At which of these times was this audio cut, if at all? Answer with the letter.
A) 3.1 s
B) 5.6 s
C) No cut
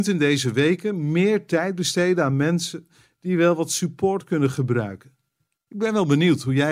B